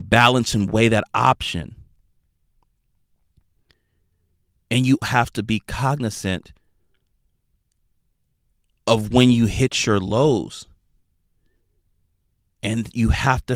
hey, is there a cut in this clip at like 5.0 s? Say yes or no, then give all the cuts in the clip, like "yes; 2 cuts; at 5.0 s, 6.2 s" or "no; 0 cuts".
yes; 1 cut; at 5.0 s